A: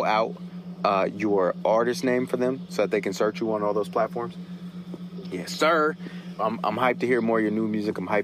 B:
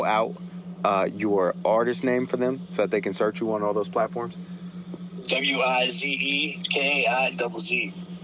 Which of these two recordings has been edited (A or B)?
A